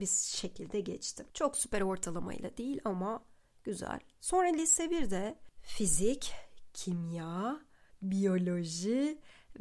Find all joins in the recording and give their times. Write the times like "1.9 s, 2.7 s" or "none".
7.9 s